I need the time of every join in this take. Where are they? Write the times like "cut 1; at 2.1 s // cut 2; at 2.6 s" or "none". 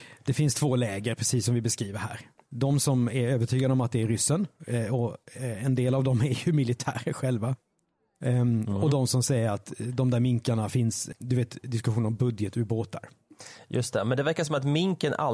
cut 1; at 11.1 s

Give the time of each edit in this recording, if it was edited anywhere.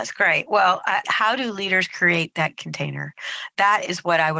cut 1; at 1.0 s

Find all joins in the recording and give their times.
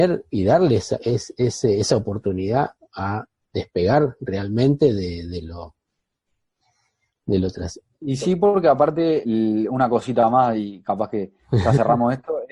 cut 1; at 7.9 s // cut 2; at 9.2 s

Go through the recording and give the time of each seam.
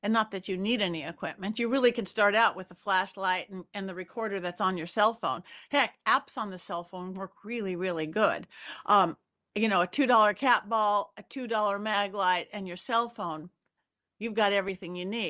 none

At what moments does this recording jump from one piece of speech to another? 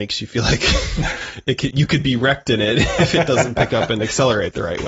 cut 1; at 1.7 s

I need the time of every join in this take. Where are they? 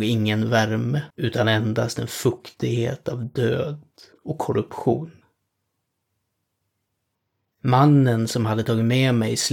cut 1; at 1.1 s

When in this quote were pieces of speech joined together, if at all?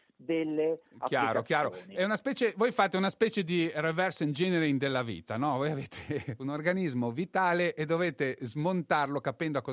none

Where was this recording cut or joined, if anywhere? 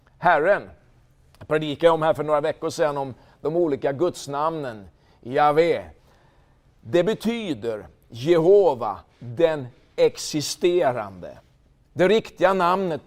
none

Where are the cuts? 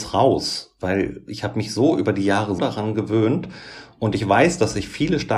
cut 1; at 2.6 s

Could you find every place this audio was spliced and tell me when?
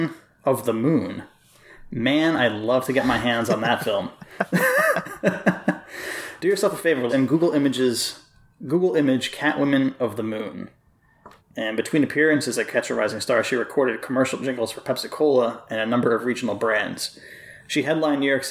cut 1; at 7.1 s // cut 2; at 11.4 s

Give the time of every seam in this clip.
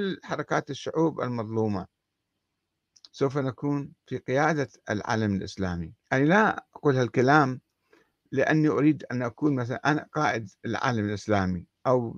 cut 1; at 6.0 s

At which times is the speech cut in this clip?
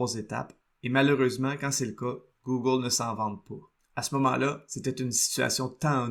cut 1; at 3.8 s

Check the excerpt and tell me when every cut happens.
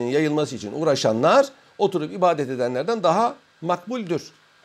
none

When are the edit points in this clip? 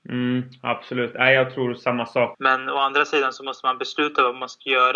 cut 1; at 2.3 s

